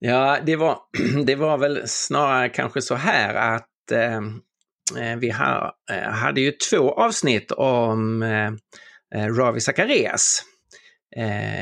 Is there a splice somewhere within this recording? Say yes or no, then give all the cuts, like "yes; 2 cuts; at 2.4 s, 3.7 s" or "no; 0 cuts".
no; 0 cuts